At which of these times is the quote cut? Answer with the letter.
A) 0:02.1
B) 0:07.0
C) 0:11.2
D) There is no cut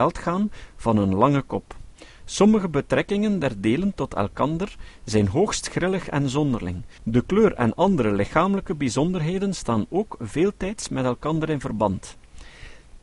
B